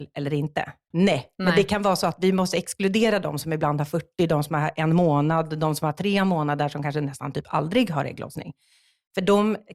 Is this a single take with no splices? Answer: no; 1 cut; at 0.9 s

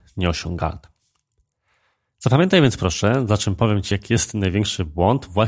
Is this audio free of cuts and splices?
yes; 0 cuts

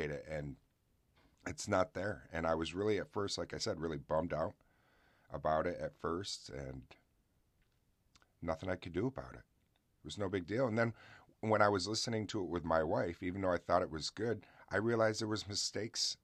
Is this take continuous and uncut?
yes; 0 cuts

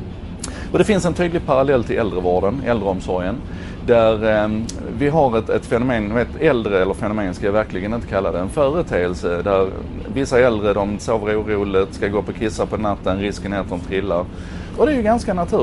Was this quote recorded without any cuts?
no; 2 cuts; at 11.0 s, 14.7 s

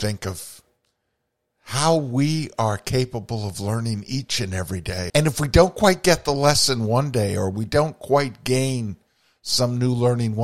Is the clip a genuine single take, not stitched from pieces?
no; 1 cut; at 5.1 s

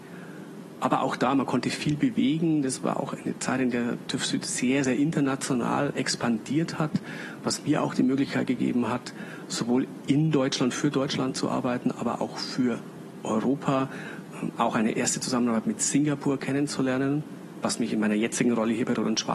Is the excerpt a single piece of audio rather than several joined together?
yes; 0 cuts

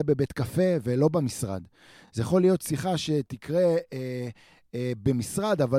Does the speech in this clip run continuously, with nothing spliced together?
yes; 0 cuts

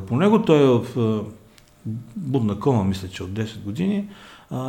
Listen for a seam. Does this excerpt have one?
no; 0 cuts

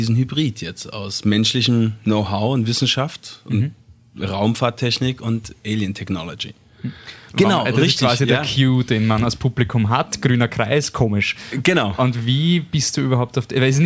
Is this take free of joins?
no; 1 cut; at 7.3 s

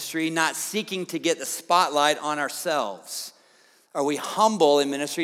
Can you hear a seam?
no; 0 cuts

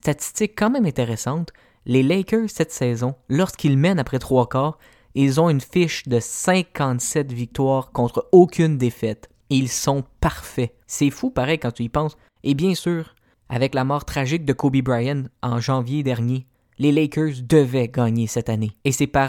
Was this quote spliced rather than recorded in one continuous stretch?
no; 0 cuts

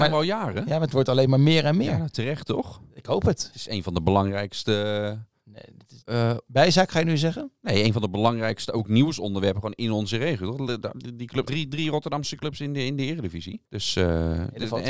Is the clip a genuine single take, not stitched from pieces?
no; 2 cuts; at 11.5 s, 13.6 s

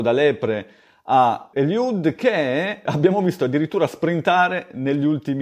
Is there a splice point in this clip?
yes; 2 cuts; at 1.5 s, 2.9 s

